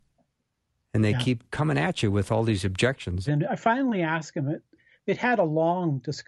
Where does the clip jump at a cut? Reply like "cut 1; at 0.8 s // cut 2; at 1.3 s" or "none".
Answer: cut 1; at 3.3 s